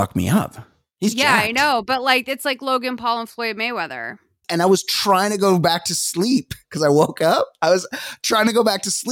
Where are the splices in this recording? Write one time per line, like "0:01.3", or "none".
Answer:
0:04.4